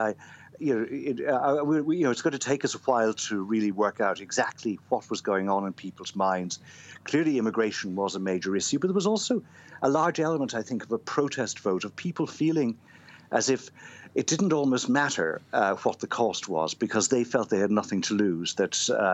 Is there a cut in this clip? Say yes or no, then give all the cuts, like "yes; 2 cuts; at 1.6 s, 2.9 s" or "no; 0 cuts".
no; 0 cuts